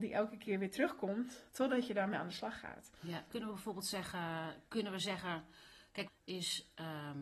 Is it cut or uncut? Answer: cut